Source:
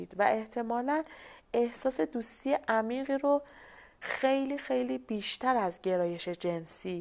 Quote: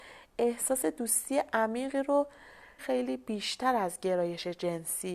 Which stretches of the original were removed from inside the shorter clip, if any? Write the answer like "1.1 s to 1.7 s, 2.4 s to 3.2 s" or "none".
3.9 s to 4.6 s